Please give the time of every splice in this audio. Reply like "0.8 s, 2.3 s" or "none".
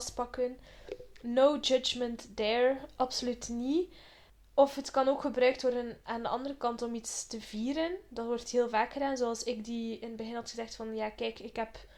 none